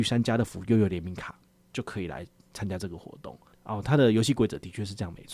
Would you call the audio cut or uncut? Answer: cut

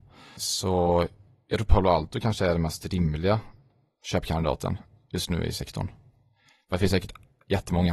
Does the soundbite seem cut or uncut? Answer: uncut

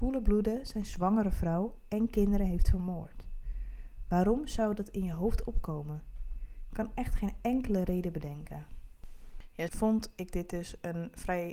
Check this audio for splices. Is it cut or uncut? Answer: cut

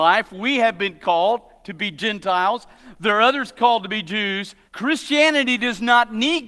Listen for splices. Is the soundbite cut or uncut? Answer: cut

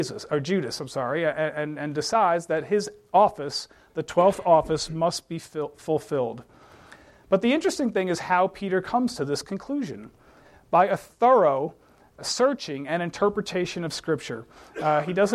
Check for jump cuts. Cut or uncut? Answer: uncut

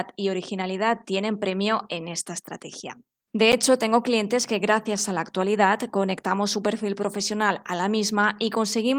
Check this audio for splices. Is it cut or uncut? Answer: cut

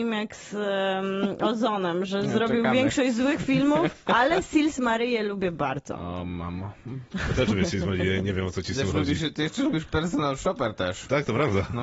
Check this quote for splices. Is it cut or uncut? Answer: uncut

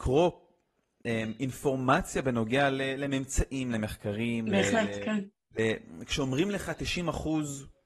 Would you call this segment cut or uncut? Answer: uncut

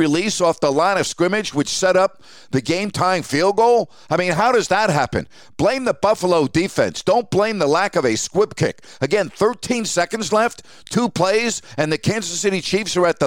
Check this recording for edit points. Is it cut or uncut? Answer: uncut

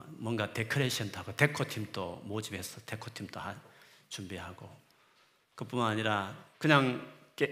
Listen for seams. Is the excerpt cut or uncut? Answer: uncut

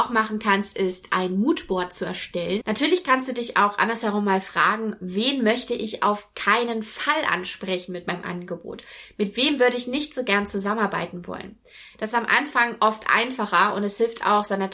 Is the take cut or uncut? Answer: cut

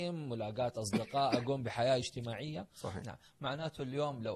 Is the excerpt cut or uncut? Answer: cut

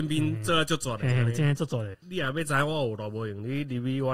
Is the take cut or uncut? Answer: cut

